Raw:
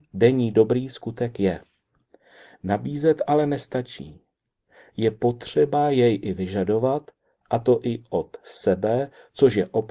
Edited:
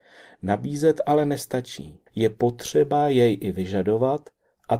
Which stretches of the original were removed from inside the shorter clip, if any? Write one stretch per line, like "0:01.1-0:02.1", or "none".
0:04.3-0:04.9